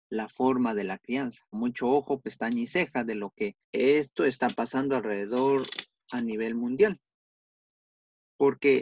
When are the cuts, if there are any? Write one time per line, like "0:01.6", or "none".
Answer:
0:01.5
0:03.6